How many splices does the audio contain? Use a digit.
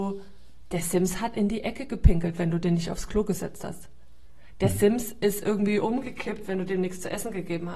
0